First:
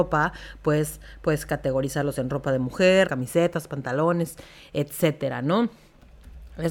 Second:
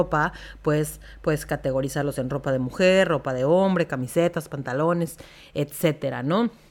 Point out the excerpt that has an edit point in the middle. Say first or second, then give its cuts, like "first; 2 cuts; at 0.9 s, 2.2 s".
first; 1 cut; at 3.1 s